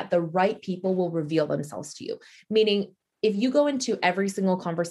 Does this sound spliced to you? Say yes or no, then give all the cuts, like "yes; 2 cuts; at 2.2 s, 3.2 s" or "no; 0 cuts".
no; 0 cuts